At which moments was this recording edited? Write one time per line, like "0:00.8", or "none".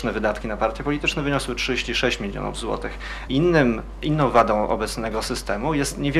0:03.3